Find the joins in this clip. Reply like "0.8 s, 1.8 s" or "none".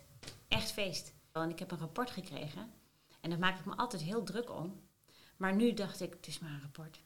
1.4 s